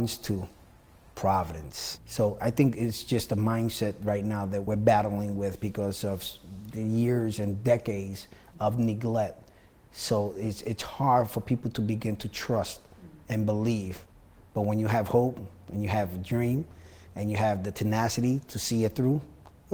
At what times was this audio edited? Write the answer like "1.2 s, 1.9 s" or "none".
none